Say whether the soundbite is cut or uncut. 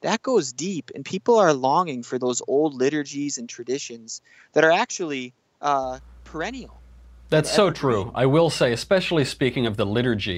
uncut